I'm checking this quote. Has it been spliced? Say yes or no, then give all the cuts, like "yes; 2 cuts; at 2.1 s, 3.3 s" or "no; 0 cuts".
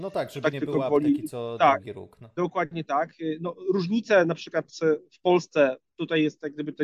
no; 0 cuts